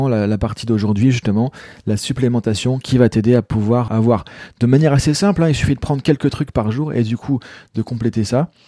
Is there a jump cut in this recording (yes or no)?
yes